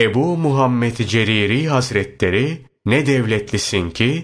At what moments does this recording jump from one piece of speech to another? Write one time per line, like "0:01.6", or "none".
0:02.7